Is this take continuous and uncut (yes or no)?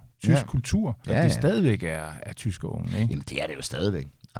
no